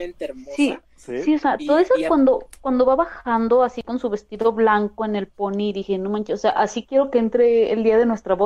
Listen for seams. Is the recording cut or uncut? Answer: uncut